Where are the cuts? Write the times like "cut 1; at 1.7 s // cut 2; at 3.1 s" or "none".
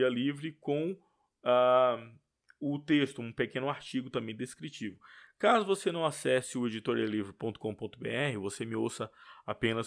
none

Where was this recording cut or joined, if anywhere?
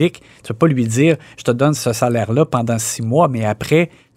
cut 1; at 1.7 s

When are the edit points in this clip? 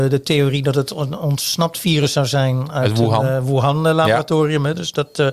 none

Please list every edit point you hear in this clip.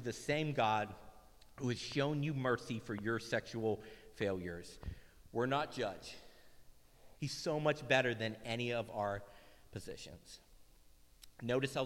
cut 1; at 7.1 s

